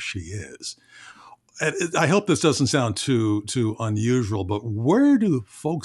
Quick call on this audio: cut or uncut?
uncut